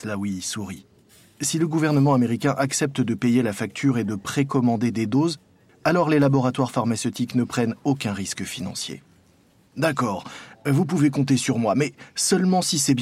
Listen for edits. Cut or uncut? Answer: cut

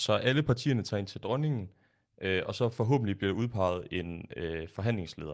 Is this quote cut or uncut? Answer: uncut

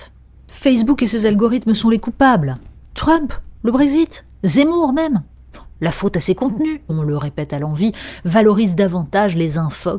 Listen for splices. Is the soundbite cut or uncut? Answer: cut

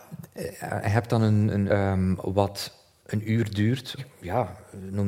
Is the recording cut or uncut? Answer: cut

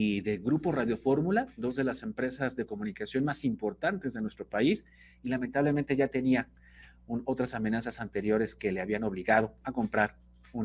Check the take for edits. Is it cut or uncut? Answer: uncut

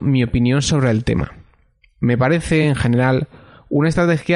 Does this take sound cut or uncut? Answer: uncut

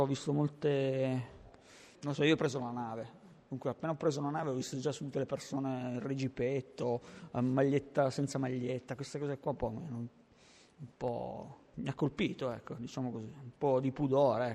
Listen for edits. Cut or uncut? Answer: uncut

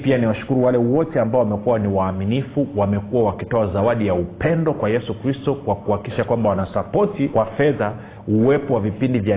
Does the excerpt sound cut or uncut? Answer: cut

